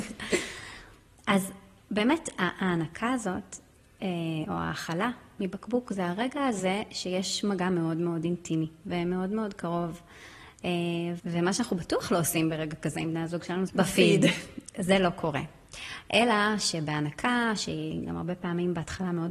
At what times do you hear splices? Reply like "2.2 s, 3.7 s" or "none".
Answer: 11.2 s, 13.7 s